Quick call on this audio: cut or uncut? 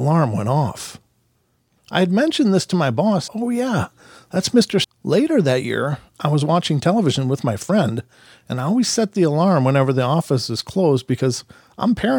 cut